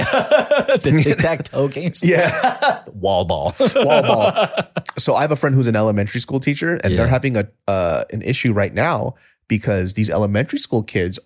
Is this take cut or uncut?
uncut